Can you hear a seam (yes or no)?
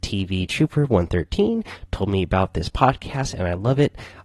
no